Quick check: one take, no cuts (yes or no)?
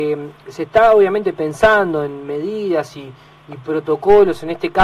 yes